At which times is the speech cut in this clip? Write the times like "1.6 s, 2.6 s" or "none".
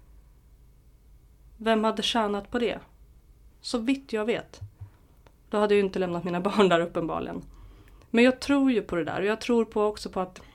3.5 s